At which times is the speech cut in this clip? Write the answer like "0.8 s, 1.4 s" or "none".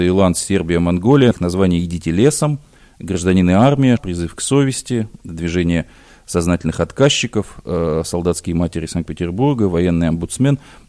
1.3 s, 4.0 s